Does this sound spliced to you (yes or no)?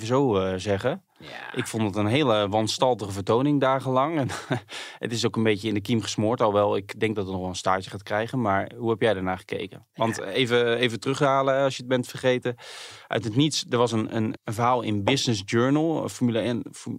yes